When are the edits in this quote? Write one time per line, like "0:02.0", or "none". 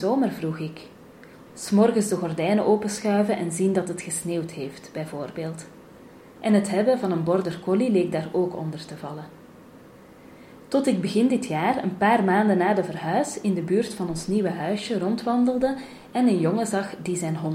0:01.5